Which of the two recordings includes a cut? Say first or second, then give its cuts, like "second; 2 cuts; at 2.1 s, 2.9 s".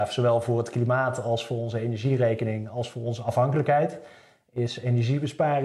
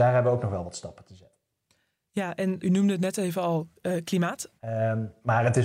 second; 2 cuts; at 2.6 s, 4.6 s